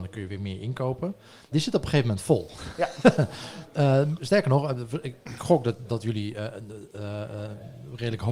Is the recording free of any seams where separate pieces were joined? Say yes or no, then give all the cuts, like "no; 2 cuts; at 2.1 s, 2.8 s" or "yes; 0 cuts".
no; 1 cut; at 1.5 s